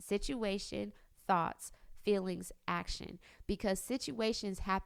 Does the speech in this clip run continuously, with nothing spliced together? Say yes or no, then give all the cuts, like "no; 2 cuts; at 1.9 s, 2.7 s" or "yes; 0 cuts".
yes; 0 cuts